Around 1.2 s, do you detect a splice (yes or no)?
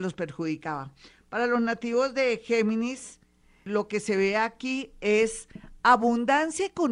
no